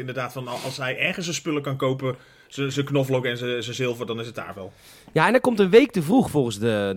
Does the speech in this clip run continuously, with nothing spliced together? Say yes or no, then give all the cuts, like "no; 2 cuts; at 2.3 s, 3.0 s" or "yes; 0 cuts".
yes; 0 cuts